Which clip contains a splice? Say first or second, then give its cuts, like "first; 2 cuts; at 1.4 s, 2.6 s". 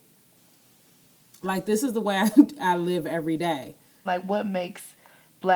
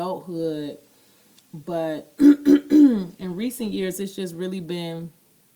first; 1 cut; at 4.1 s